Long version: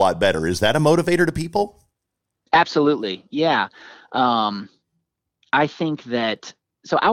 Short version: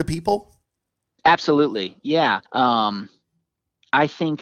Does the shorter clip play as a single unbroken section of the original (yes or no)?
no